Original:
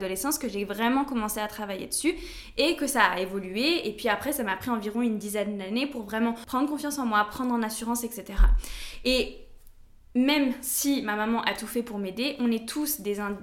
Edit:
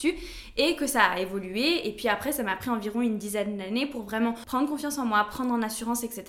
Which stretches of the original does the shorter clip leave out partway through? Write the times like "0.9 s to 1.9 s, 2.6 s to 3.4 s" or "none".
none

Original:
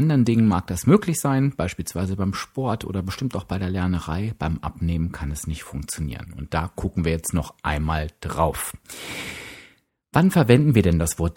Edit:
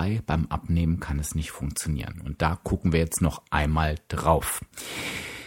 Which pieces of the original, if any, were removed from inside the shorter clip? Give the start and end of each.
none

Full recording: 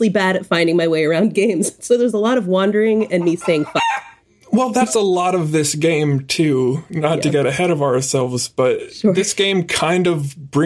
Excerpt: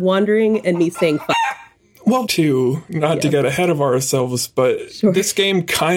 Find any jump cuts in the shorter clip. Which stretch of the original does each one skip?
4.7 s to 6.3 s

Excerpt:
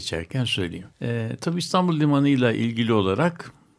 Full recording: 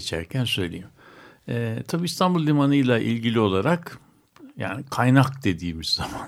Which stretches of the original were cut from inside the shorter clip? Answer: 0.9 s to 1.4 s

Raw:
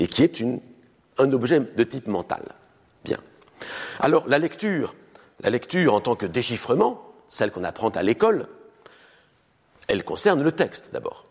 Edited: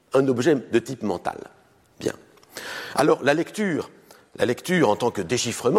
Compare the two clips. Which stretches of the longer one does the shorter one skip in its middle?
none

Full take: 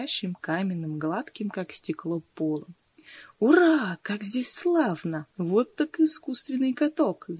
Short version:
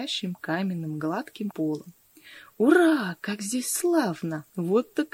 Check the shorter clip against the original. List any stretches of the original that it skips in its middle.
1.5 s to 2.3 s

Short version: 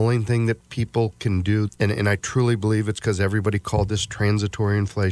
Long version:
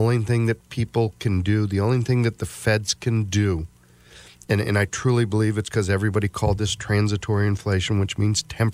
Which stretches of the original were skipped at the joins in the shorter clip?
1.7 s to 4.4 s

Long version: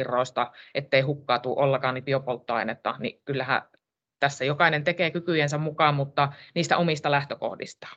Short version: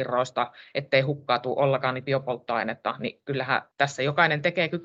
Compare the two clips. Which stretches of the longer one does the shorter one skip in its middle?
3.7 s to 4.1 s

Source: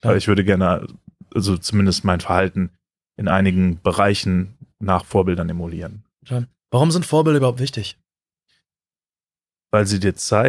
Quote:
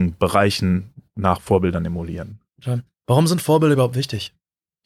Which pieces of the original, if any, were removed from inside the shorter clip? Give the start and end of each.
none

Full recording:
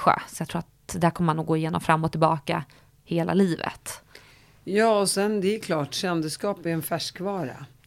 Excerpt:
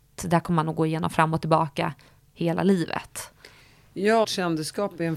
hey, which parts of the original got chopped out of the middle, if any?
4.9 s to 5.9 s

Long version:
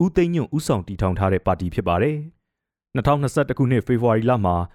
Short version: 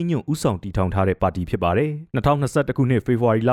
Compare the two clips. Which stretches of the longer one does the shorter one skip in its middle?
2.3 s to 2.9 s

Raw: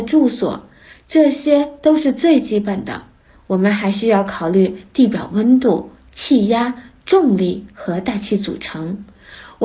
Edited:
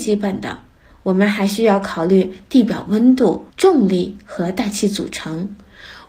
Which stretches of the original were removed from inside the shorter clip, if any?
5.9 s to 7.0 s

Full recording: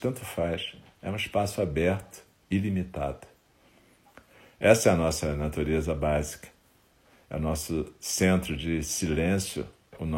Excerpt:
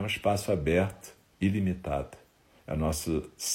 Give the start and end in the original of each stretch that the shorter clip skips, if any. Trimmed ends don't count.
3.7 s to 7.2 s

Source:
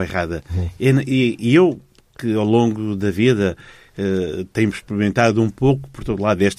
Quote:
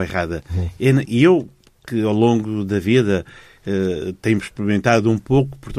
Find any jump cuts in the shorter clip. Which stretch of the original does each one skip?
1.1 s to 1.4 s

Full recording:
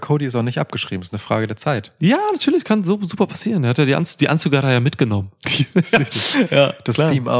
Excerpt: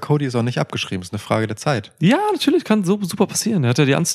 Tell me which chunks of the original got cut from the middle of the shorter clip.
none

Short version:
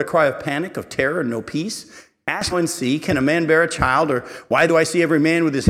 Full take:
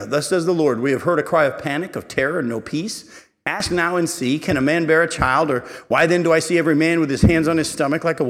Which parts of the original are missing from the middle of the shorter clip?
3.7 s to 3.9 s, 6.1 s to 6.2 s

